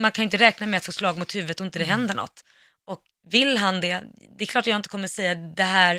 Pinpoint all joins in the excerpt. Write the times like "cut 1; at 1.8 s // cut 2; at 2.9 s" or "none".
cut 1; at 3.1 s